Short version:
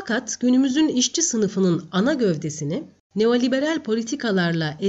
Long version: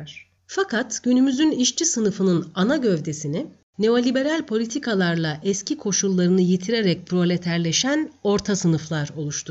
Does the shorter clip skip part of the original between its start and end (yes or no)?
no